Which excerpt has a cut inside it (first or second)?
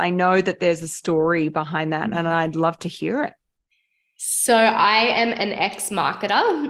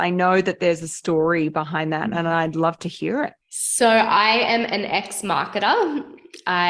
second